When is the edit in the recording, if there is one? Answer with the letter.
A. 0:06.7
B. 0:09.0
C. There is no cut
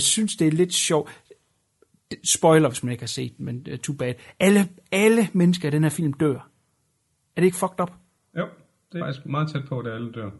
B